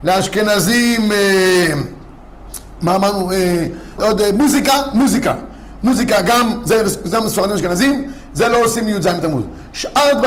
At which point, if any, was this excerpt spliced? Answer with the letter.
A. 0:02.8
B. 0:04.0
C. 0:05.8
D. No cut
B